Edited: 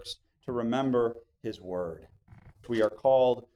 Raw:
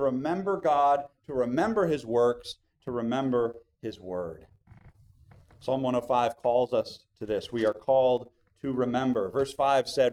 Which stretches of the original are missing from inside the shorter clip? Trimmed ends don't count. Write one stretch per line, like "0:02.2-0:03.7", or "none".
0:05.0-0:07.5